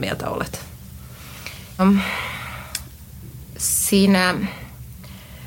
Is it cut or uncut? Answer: cut